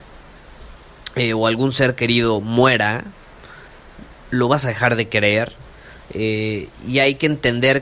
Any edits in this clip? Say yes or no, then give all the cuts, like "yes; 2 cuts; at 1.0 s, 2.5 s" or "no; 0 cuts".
yes; 1 cut; at 6.0 s